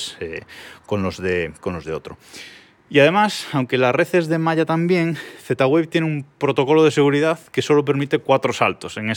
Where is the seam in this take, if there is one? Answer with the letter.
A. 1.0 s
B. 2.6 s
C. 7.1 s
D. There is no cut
D